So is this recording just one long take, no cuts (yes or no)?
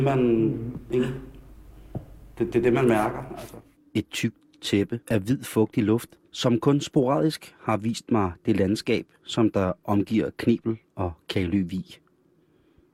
no